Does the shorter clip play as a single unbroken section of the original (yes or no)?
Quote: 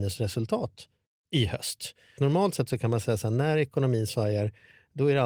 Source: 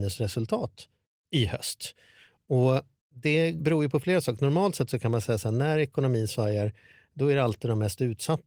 no